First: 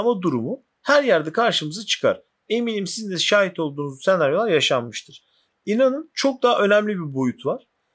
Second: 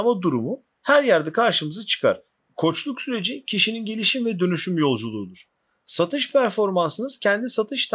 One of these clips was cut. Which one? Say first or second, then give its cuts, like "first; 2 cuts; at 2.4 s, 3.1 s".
second; 1 cut; at 2.4 s